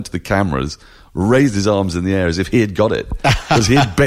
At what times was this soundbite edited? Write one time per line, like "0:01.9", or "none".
none

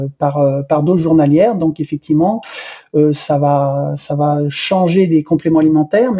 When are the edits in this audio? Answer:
none

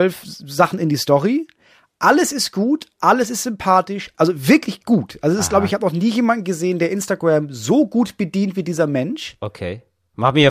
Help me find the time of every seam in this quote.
0:04.1

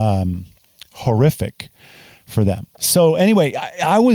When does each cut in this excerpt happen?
0:02.7

